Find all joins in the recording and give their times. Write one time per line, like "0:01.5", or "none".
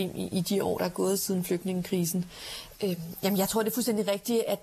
0:02.7